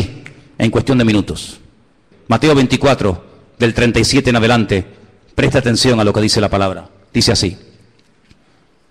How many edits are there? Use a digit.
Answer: 1